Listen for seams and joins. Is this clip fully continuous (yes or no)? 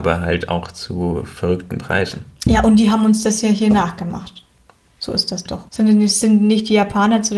no